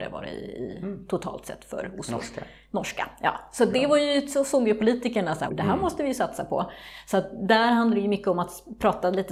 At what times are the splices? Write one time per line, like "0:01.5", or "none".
0:05.5